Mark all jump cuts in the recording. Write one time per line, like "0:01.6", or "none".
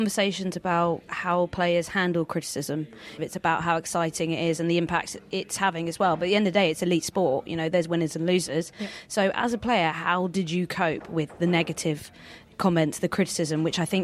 0:03.2